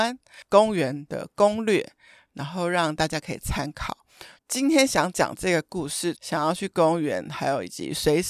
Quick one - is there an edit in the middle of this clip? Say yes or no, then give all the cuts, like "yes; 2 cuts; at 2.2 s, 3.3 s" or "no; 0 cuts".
yes; 2 cuts; at 4.4 s, 6.1 s